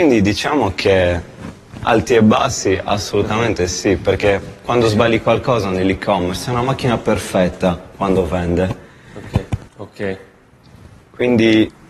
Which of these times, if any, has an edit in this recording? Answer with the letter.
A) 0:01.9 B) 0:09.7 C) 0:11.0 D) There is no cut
B